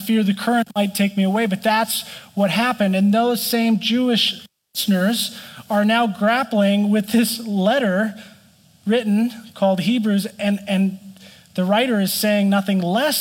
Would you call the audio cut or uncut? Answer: uncut